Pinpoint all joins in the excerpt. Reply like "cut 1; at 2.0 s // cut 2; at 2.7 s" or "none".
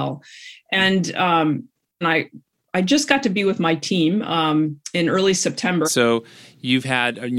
cut 1; at 2.0 s // cut 2; at 5.8 s